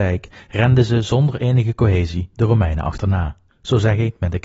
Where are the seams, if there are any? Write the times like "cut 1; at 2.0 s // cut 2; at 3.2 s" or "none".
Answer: cut 1; at 3.5 s

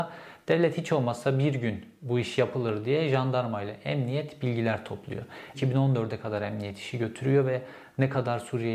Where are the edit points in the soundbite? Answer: cut 1; at 5.5 s

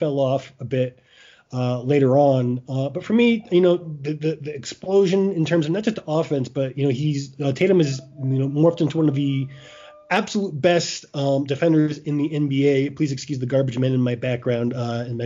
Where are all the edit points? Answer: none

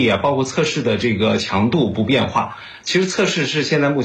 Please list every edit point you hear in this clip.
cut 1; at 2.8 s

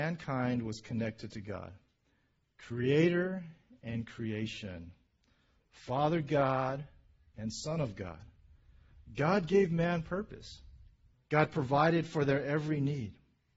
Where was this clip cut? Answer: cut 1; at 11.1 s

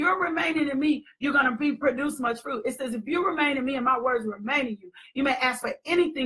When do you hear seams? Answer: none

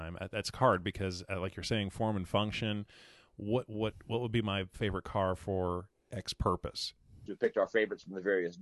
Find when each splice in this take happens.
cut 1; at 7.3 s

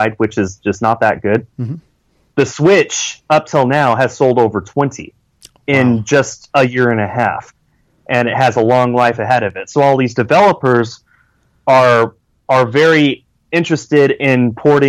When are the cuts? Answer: none

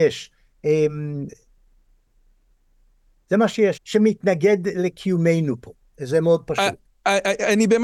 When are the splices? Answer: cut 1; at 3.8 s

